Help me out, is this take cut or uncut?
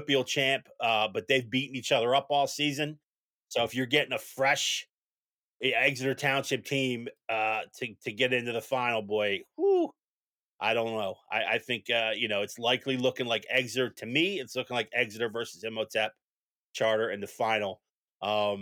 uncut